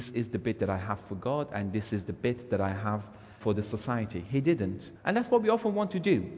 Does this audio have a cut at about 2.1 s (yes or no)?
no